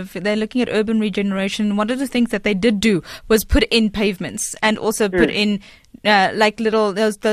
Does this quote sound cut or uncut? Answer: uncut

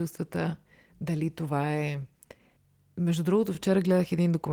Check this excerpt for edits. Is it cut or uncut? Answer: uncut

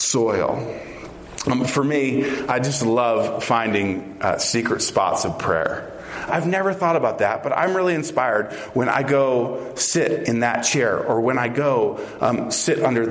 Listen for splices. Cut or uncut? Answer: cut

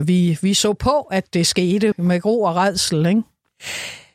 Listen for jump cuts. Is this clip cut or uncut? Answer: cut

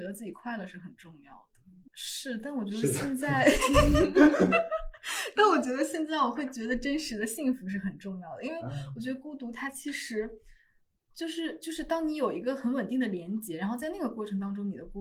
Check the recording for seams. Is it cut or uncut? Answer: cut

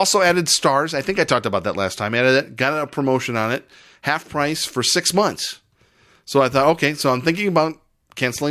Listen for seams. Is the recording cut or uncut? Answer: uncut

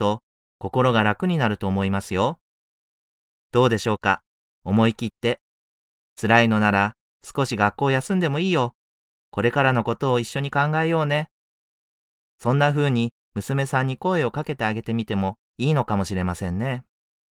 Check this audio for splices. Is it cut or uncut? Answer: uncut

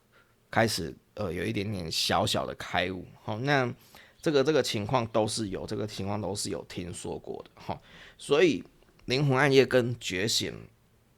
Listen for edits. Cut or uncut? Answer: uncut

